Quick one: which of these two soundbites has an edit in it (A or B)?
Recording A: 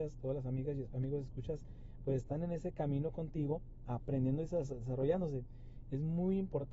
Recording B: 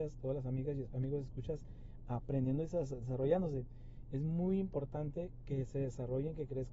B